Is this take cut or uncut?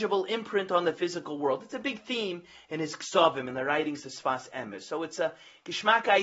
uncut